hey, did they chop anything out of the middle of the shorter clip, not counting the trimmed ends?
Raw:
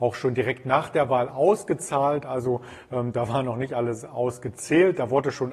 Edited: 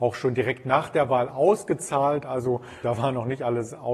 yes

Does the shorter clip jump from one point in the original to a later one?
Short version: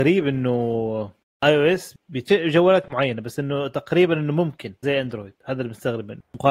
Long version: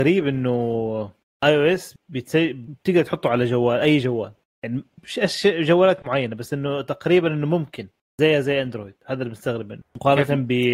yes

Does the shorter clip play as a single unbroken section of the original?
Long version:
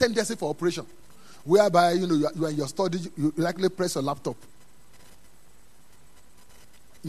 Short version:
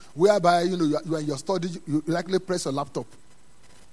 yes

